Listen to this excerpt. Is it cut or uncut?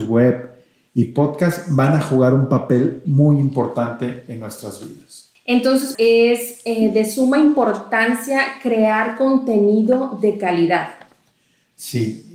cut